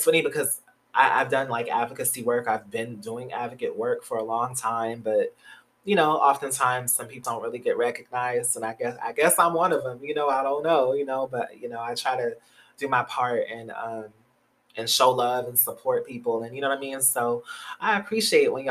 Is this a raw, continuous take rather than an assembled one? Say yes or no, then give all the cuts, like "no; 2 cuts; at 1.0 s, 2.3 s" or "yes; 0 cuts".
no; 1 cut; at 7.2 s